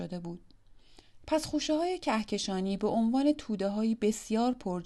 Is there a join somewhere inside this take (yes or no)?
yes